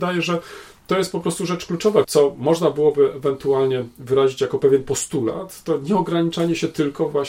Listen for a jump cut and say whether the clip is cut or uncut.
cut